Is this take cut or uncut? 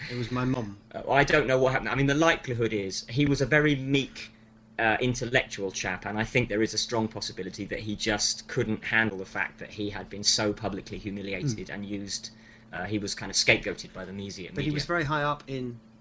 uncut